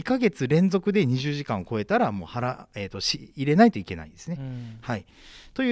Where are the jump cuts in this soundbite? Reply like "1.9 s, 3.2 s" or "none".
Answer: none